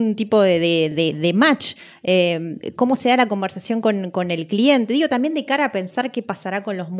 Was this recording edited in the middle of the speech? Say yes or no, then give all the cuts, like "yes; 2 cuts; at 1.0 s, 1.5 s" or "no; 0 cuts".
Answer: no; 0 cuts